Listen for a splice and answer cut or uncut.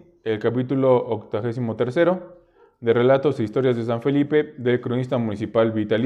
uncut